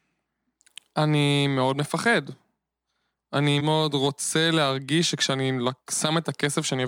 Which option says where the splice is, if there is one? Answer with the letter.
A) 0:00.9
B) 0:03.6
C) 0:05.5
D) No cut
B